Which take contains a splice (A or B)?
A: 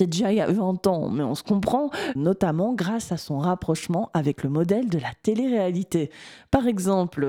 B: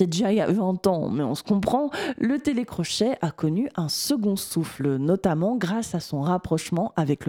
A